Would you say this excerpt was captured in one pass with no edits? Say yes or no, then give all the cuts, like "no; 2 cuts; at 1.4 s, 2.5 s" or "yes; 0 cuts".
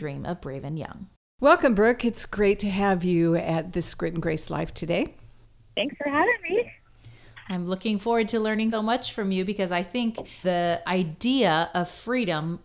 no; 2 cuts; at 8.7 s, 10.4 s